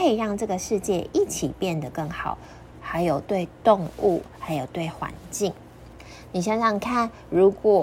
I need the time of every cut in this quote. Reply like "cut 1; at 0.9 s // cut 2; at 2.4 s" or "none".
cut 1; at 2.7 s